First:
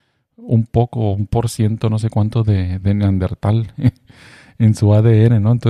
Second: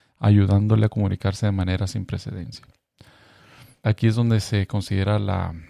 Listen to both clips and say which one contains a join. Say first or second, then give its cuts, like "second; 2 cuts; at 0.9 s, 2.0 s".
second; 1 cut; at 3.8 s